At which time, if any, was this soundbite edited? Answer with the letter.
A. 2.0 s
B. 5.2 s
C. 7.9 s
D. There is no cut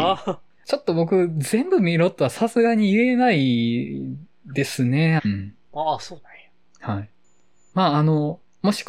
B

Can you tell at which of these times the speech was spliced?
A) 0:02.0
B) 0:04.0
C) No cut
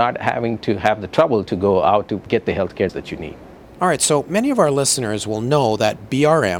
C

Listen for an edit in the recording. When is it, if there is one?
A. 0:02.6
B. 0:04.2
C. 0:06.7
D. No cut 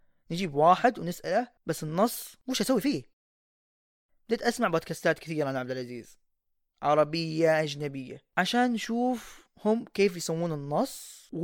D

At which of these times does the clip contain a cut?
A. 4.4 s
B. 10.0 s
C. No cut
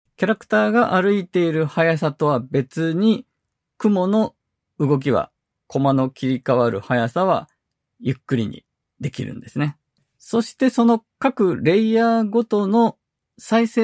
B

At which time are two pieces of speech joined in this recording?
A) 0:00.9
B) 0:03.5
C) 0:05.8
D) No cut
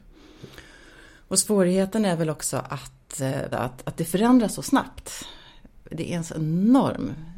B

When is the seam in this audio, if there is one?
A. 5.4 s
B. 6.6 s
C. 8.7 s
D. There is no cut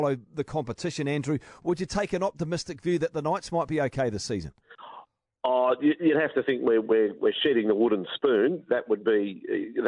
D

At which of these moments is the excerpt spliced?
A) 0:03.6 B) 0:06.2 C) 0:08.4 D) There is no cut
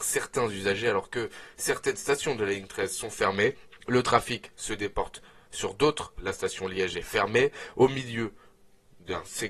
B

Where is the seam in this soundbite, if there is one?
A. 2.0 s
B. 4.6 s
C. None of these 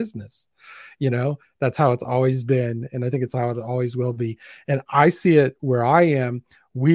C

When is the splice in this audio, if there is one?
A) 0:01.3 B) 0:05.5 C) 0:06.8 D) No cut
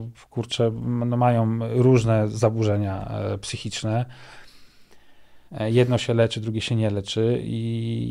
B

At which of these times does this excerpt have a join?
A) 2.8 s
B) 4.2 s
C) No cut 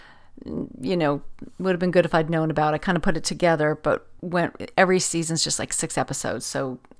B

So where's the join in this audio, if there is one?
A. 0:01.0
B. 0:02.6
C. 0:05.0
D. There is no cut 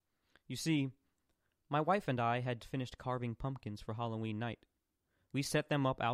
B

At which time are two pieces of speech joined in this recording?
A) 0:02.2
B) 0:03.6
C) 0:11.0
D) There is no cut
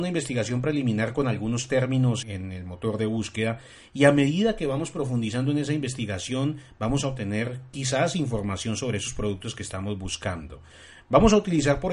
A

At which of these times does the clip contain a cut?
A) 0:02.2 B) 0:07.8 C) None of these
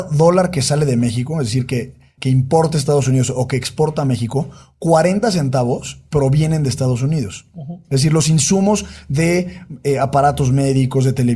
A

